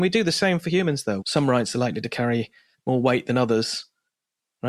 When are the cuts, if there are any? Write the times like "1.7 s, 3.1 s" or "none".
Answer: 1.2 s